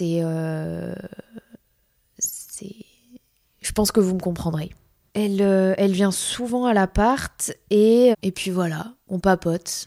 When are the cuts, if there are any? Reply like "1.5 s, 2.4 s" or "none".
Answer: 5.1 s, 8.1 s

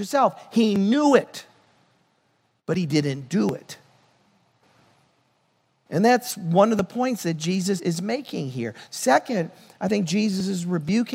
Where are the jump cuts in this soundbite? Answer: 7.8 s

